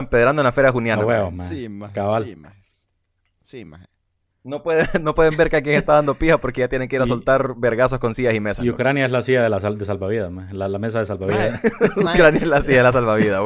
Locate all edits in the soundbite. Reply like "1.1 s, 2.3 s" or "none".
none